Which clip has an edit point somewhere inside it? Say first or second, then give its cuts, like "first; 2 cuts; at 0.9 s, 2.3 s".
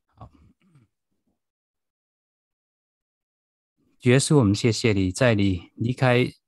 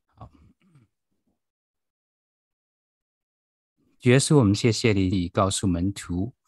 second; 1 cut; at 5.1 s